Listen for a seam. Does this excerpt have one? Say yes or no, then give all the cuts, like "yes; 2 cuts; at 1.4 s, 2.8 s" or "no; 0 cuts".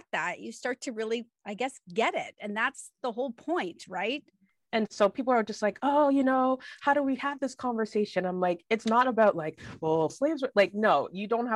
yes; 1 cut; at 10.1 s